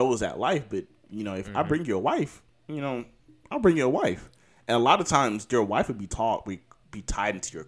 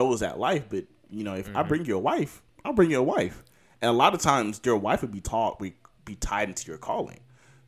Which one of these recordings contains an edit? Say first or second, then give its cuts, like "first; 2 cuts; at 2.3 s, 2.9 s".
second; 1 cut; at 2.6 s